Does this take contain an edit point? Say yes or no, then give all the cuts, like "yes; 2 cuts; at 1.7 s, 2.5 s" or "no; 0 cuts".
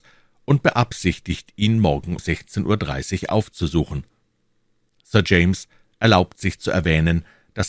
yes; 1 cut; at 2.2 s